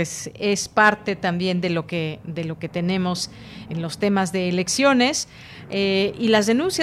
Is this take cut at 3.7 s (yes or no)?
yes